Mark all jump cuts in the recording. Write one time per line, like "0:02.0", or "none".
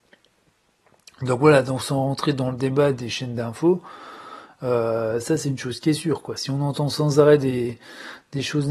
none